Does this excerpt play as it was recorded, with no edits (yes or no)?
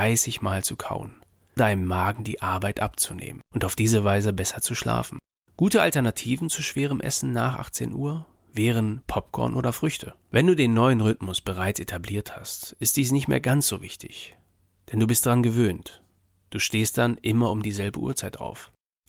no